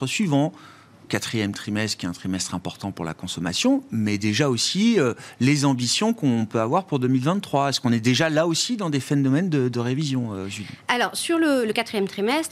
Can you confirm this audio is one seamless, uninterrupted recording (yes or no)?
yes